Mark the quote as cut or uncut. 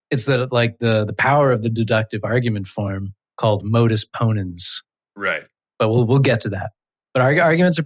uncut